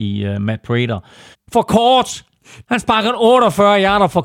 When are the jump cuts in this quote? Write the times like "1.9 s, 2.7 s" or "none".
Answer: 1.3 s, 2.6 s

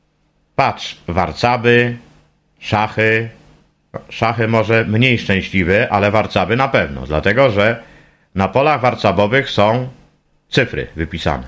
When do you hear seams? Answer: none

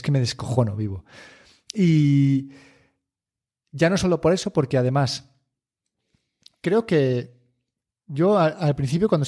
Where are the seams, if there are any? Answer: none

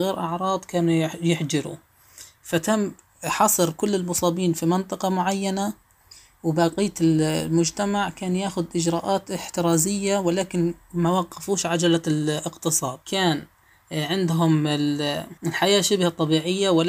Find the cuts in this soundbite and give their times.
13.0 s, 15.4 s

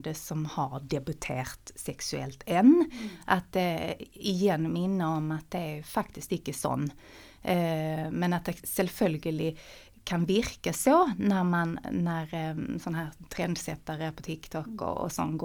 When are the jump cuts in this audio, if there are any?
none

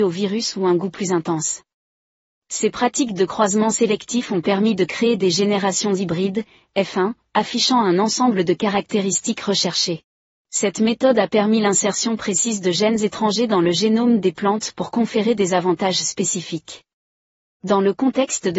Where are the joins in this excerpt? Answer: 10.3 s, 17.4 s

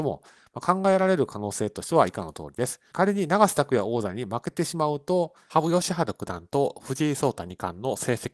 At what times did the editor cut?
2.9 s

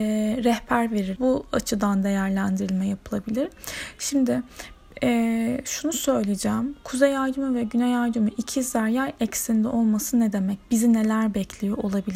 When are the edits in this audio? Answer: 1.2 s

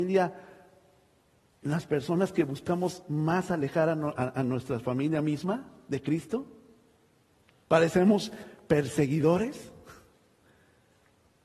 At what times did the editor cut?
none

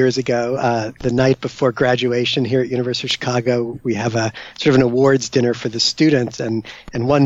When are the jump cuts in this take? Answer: none

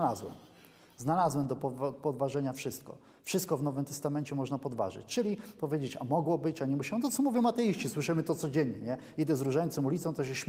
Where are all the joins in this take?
none

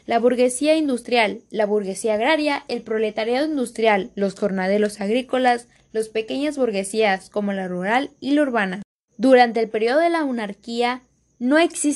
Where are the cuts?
none

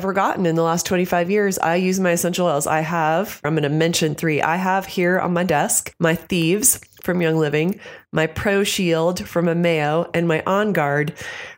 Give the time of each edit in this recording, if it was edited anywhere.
3.4 s

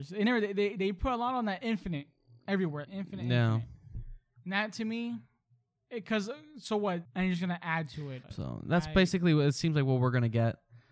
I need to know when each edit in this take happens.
2.9 s, 7.0 s, 8.2 s

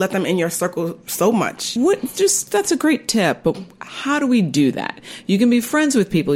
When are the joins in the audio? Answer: 1.8 s

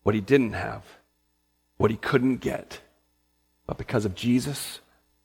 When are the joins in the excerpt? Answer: none

